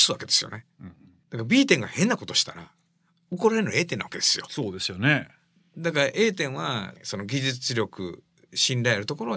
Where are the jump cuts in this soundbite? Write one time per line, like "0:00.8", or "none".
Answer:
none